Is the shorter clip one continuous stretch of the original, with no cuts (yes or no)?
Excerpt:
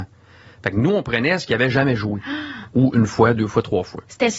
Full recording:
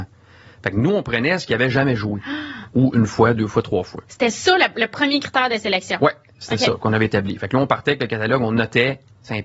yes